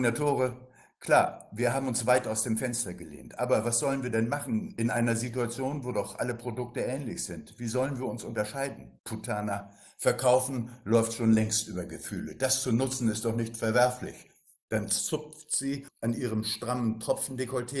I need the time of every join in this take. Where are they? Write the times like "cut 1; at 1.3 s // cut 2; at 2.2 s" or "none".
cut 1; at 9.0 s

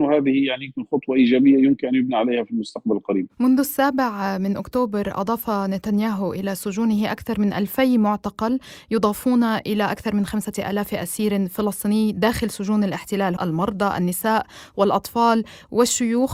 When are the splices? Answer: cut 1; at 13.4 s

